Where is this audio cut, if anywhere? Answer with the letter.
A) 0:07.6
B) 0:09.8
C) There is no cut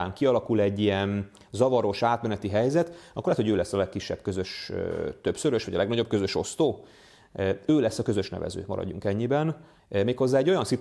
B